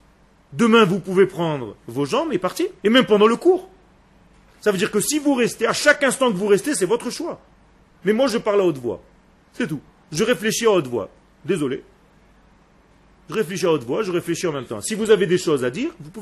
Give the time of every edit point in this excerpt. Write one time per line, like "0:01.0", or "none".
0:02.8